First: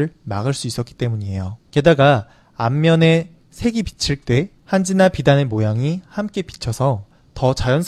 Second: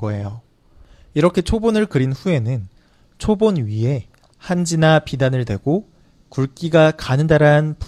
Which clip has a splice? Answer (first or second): first